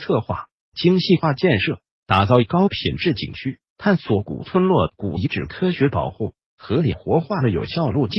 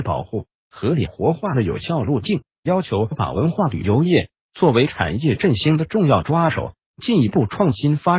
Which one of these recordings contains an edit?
first; 1 cut; at 3.7 s

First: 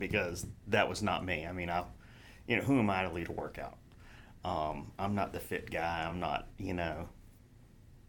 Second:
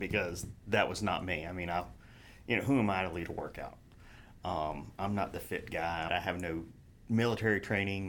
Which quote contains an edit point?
second; 1 cut; at 6.1 s

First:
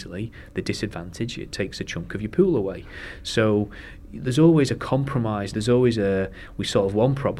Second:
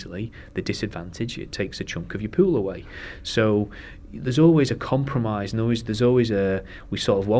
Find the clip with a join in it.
first; 1 cut; at 5.5 s

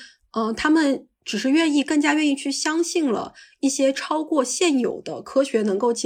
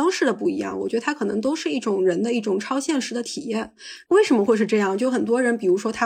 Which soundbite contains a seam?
second; 1 cut; at 4.0 s

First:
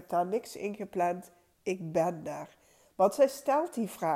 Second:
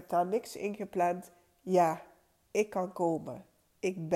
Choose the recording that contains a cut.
first; 1 cut; at 1.5 s

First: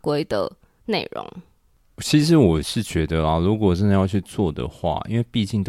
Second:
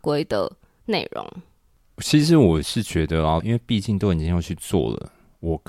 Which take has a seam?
second; 1 cut; at 3.4 s

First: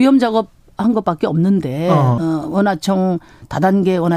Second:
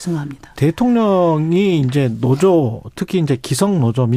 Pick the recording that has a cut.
first; 1 cut; at 2.2 s

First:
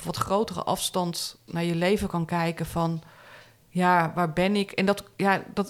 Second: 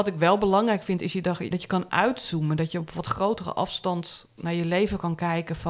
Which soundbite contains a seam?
second; 1 cut; at 1.5 s

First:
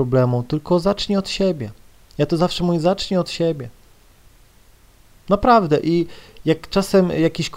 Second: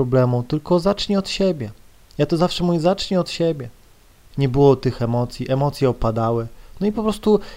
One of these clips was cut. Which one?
second; 1 cut; at 4.3 s

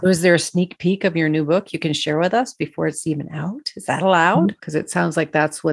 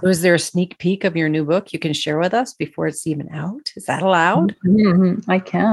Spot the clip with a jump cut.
first; 1 cut; at 4.6 s

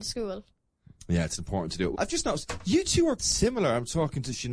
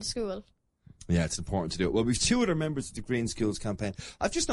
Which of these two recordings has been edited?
first; 2 cuts; at 1.9 s, 3.2 s

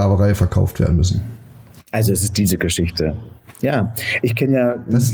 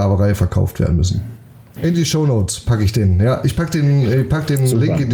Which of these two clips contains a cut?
second; 1 cut; at 1.8 s

